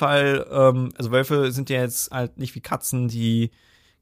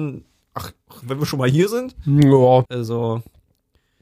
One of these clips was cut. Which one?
second; 1 cut; at 2.6 s

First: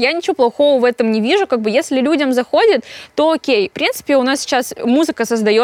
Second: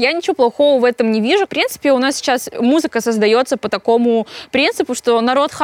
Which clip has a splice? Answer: second; 1 cut; at 1.5 s

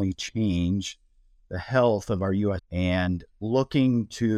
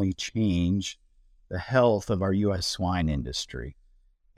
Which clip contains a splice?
first; 1 cut; at 2.6 s

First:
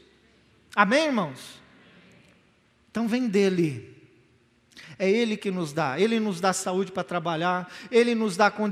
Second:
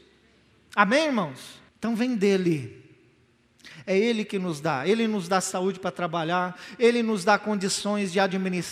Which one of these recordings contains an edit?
second; 1 cut; at 1.7 s

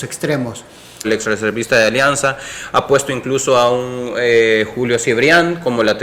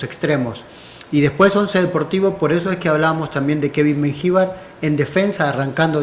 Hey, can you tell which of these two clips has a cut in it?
first; 1 cut; at 1.0 s

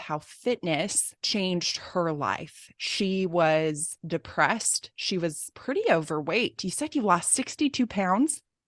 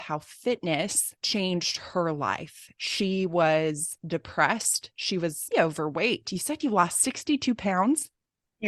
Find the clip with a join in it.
second; 1 cut; at 5.5 s

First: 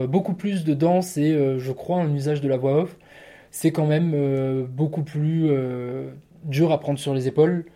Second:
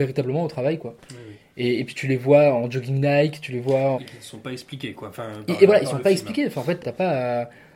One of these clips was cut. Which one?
second; 2 cuts; at 3.9 s, 6.8 s

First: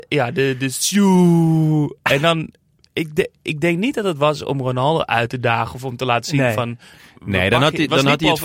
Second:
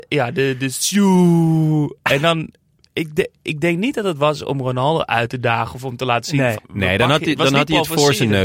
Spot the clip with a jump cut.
second; 1 cut; at 6.5 s

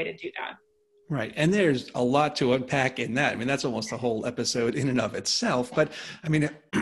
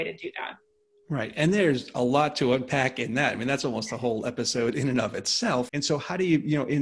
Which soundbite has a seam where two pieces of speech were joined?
second; 1 cut; at 5.7 s

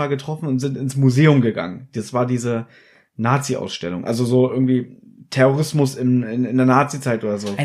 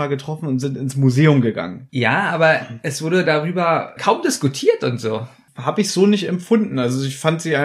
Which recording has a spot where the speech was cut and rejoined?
second; 3 cuts; at 1.9 s, 4.0 s, 5.5 s

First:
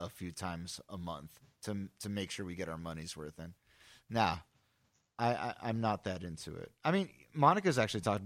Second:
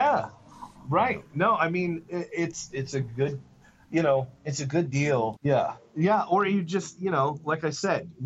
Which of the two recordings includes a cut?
second; 2 cuts; at 2.7 s, 5.4 s

